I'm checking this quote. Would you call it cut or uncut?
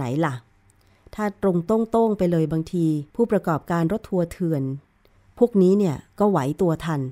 cut